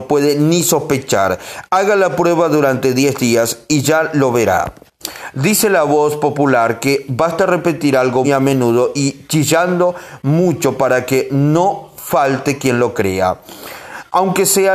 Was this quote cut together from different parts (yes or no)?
yes